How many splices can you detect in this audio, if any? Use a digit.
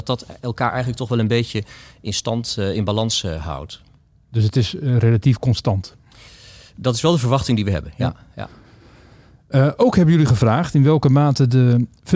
0